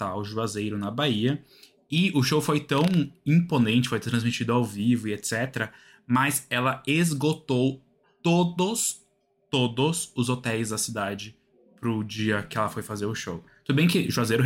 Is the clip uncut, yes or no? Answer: yes